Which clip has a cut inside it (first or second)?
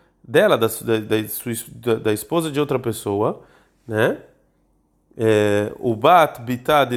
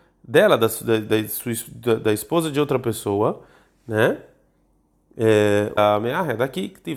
second